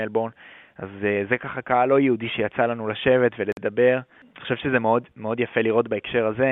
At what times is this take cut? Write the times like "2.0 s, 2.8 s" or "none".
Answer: none